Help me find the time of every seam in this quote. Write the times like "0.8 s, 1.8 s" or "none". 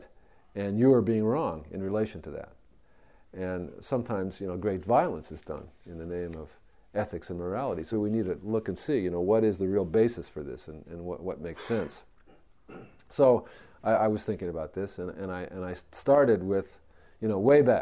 7.9 s